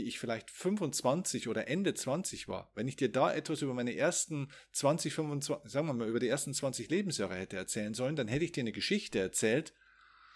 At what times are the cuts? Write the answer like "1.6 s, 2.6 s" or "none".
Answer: none

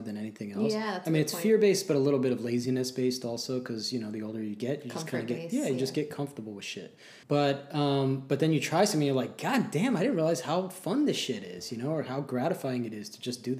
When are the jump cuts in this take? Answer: 7.2 s

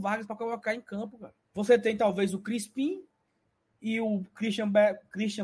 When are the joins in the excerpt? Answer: 1.4 s

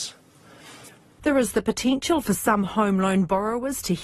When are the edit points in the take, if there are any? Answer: 1.2 s

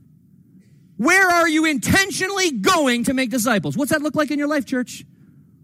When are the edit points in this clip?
1.0 s

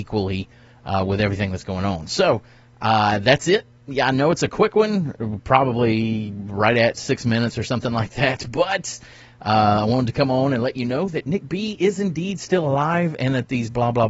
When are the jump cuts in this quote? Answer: none

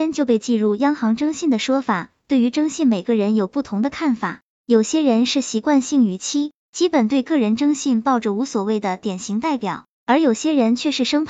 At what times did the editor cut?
none

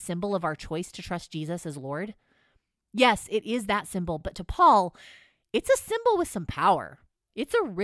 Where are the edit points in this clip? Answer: none

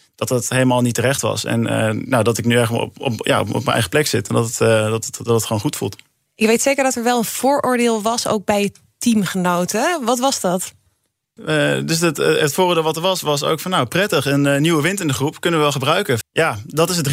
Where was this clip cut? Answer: 11.4 s, 16.2 s

